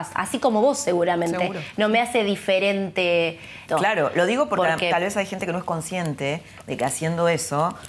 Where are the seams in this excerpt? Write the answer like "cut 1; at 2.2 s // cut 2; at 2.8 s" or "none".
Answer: cut 1; at 3.7 s